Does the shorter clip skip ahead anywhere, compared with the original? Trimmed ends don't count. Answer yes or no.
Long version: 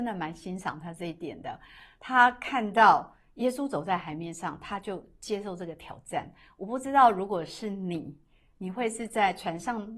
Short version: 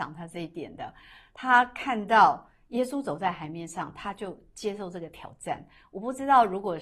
no